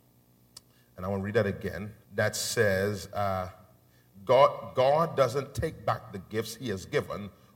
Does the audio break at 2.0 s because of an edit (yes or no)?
yes